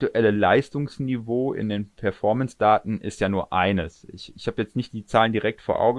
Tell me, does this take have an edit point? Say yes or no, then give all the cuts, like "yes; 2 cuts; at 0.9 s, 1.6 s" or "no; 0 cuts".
no; 0 cuts